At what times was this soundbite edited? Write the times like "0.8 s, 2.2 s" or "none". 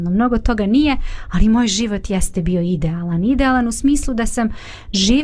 none